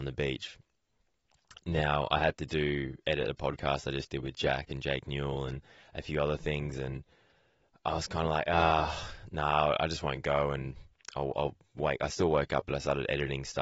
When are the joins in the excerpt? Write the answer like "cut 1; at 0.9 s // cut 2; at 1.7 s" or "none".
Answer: none